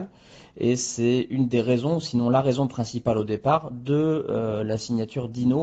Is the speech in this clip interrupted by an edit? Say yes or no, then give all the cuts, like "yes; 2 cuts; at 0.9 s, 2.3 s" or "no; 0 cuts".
no; 0 cuts